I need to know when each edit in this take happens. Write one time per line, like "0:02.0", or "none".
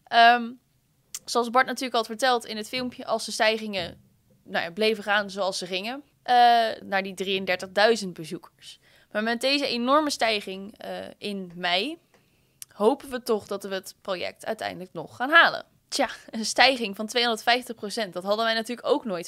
0:06.8
0:15.8